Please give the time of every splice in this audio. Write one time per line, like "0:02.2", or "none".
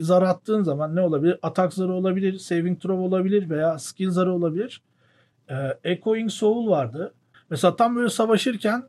0:05.3
0:07.3